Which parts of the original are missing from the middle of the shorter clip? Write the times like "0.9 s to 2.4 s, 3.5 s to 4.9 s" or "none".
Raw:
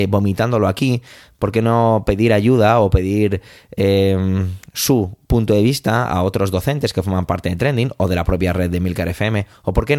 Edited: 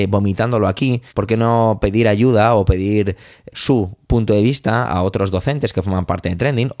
1.1 s to 1.3 s, 3.7 s to 4.7 s